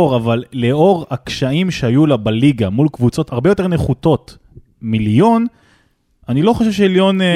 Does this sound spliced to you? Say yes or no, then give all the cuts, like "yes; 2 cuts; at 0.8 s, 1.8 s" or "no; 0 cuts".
yes; 1 cut; at 3.3 s